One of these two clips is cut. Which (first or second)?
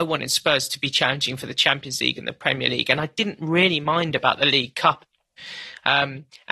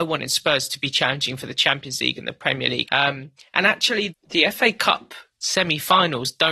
second